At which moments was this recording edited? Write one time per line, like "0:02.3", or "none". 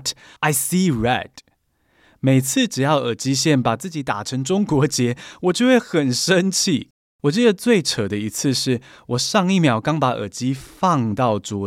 none